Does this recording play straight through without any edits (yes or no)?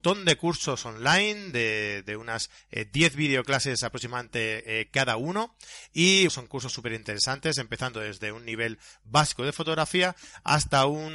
no